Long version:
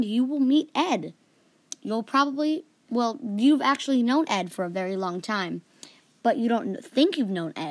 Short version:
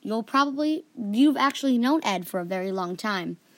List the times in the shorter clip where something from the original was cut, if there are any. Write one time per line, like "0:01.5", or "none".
0:00.9